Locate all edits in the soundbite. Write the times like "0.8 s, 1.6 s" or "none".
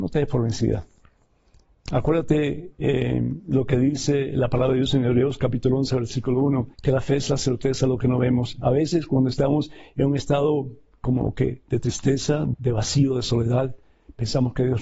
6.7 s, 12.5 s